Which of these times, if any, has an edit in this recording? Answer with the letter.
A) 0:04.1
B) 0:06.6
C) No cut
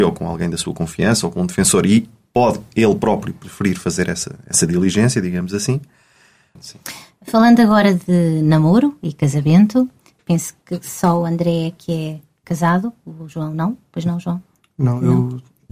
B